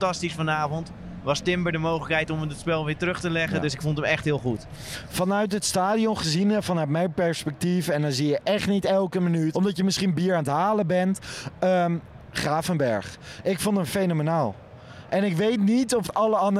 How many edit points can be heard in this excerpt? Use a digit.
1